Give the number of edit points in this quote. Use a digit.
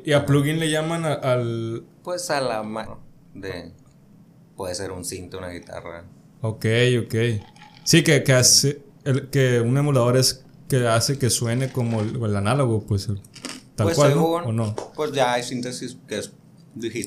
1